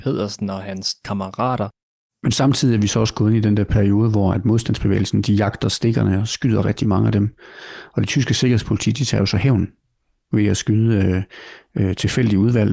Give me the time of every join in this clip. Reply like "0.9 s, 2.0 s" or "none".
2.1 s

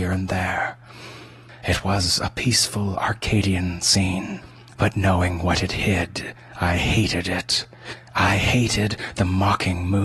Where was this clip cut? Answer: none

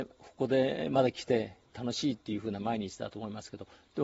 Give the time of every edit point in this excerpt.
none

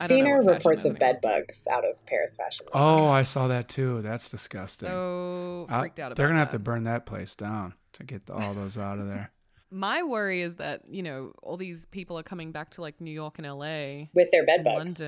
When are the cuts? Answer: 9.6 s

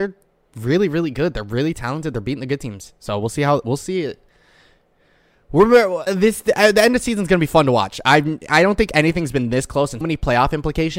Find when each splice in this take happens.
6.1 s, 10.0 s

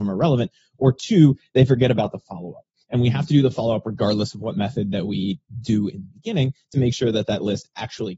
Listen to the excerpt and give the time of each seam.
none

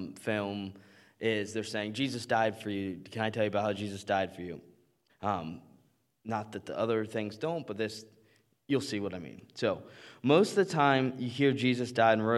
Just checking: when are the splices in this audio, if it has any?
5.1 s

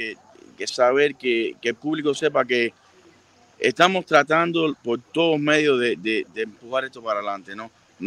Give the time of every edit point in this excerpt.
6.3 s

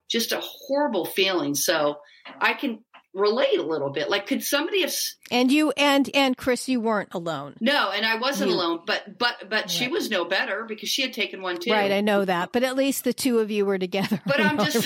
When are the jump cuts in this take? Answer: none

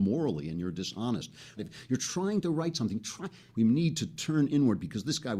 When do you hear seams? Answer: 1.6 s, 3.5 s

